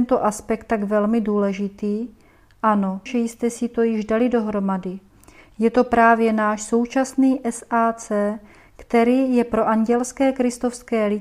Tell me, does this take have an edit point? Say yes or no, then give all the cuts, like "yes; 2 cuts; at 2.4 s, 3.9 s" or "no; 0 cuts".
yes; 1 cut; at 3.1 s